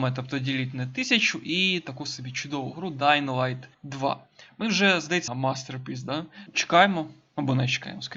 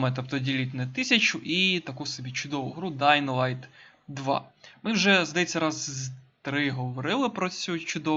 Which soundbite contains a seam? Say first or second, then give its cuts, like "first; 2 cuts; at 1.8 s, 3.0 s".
first; 3 cuts; at 3.7 s, 5.3 s, 6.5 s